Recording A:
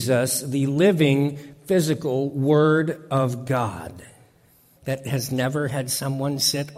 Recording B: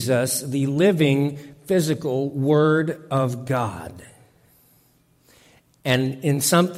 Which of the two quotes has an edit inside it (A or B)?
A